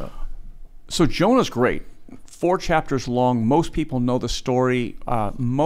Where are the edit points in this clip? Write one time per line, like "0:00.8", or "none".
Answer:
none